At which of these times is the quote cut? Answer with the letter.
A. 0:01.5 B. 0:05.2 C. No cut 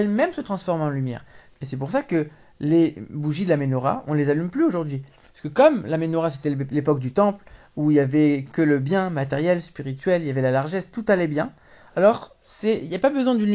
A